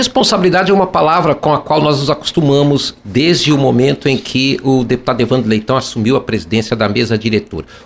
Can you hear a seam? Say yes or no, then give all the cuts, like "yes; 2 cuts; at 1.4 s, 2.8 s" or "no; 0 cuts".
no; 0 cuts